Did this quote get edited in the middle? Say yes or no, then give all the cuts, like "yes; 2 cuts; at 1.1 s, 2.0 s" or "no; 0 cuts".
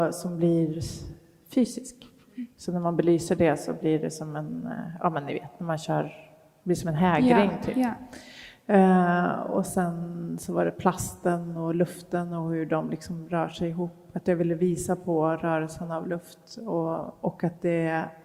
no; 0 cuts